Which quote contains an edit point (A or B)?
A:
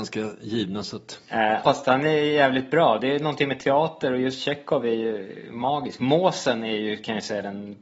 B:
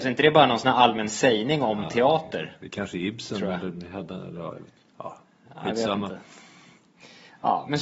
A